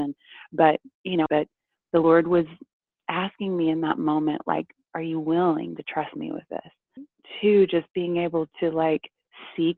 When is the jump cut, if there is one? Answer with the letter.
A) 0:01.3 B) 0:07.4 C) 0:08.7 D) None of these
A